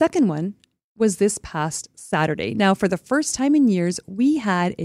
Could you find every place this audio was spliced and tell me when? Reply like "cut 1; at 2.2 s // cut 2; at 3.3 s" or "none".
none